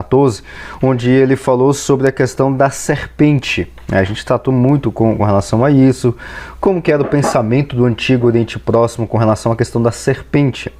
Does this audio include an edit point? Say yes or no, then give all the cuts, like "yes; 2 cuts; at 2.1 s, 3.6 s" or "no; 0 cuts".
no; 0 cuts